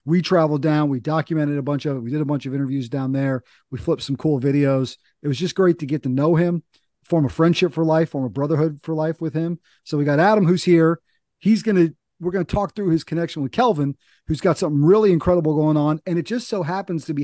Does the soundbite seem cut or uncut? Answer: cut